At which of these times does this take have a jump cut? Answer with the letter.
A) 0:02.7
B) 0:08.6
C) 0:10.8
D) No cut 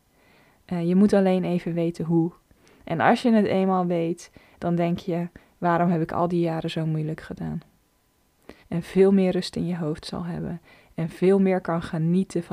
B